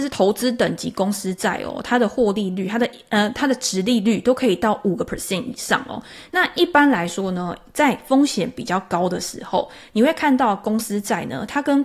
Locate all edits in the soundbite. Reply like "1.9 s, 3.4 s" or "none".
6.3 s

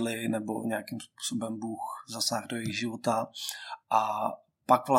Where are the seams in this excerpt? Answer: none

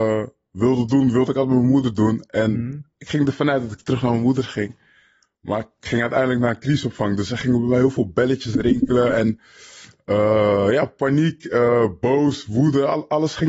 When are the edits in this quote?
none

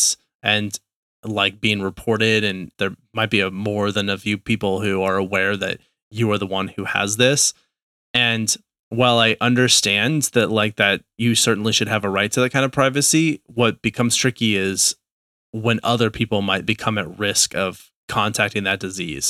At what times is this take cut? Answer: 16.7 s

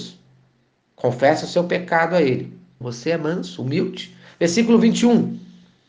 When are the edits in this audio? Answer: 2.8 s

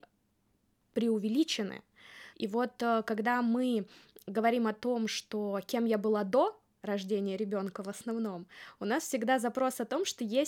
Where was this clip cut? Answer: 2.3 s

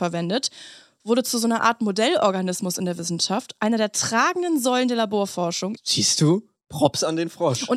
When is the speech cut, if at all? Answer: 5.8 s

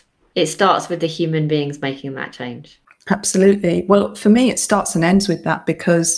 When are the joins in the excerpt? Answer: none

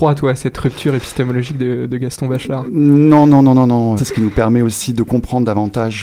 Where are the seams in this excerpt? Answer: 4.0 s

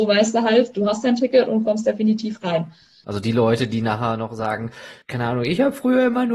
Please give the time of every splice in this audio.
3.0 s, 5.0 s

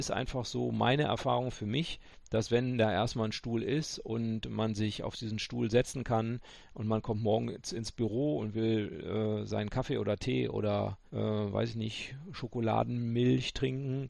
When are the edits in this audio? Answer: 11.1 s

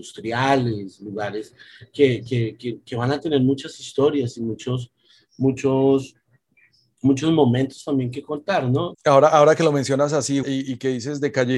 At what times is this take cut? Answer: 8.9 s, 10.4 s

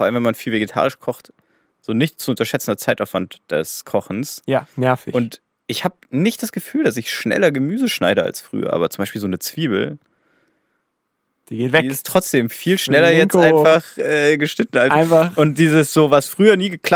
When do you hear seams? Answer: none

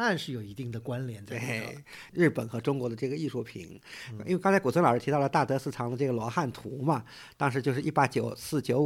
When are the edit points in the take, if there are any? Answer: 2.1 s

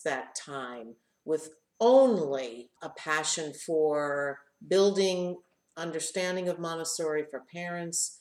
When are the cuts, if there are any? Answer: 2.8 s

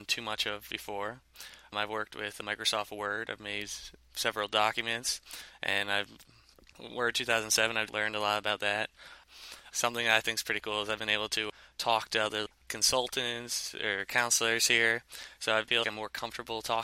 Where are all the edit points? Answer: 15.8 s

